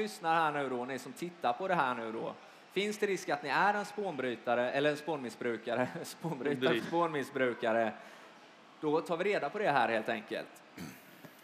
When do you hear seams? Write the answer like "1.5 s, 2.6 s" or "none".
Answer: 6.8 s